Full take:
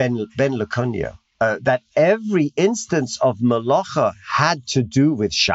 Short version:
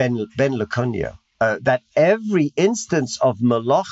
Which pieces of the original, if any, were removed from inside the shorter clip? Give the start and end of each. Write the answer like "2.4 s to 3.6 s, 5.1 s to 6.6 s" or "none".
none